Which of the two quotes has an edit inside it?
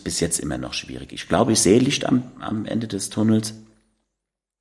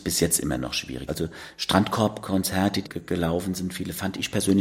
second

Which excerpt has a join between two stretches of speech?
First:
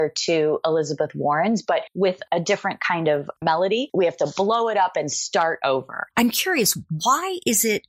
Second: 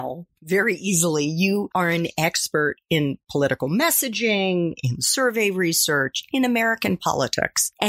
first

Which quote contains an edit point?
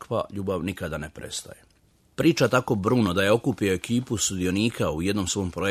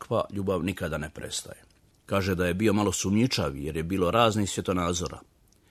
second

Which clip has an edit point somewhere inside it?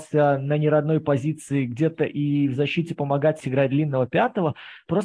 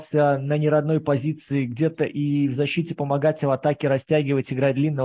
first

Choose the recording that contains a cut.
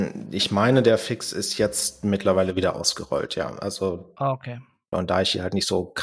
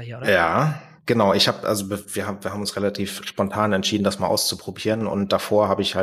first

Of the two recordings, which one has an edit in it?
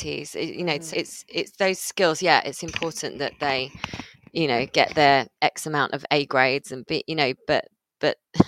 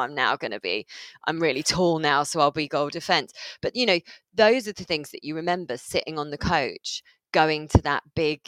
first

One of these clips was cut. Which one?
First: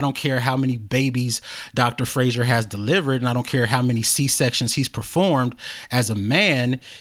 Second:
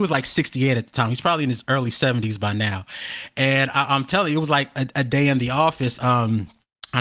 second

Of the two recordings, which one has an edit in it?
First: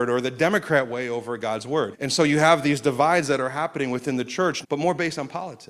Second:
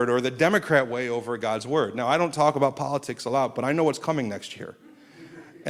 first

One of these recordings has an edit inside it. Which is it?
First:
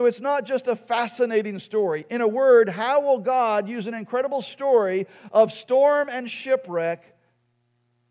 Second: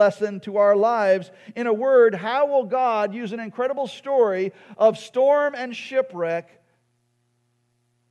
first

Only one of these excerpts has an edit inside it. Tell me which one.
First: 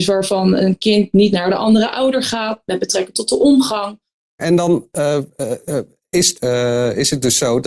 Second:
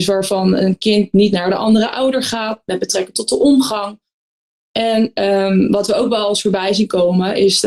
first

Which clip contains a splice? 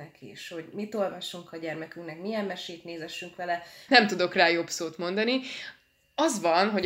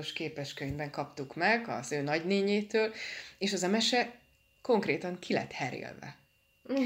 first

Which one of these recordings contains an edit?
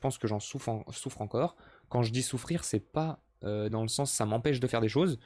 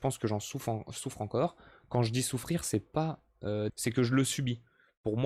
second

